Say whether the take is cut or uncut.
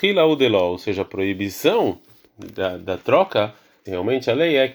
cut